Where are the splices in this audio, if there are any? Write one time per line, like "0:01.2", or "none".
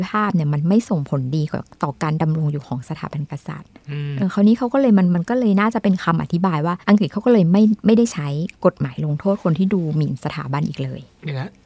0:04.2
0:06.8